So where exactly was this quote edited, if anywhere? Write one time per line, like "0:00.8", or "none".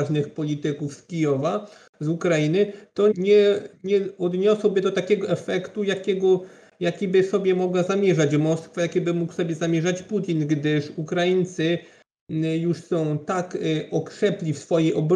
0:03.1